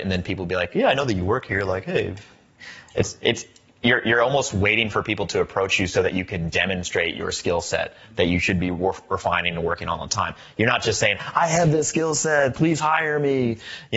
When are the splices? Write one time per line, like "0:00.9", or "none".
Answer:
none